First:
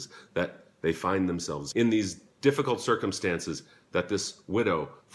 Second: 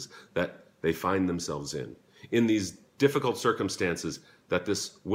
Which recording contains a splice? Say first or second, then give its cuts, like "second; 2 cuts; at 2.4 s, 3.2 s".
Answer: first; 1 cut; at 1.7 s